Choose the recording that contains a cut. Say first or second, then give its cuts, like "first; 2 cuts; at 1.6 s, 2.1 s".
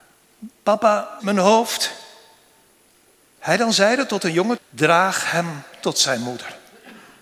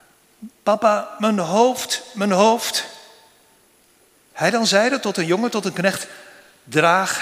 first; 2 cuts; at 1.2 s, 4.6 s